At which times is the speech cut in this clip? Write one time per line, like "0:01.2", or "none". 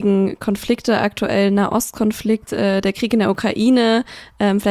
none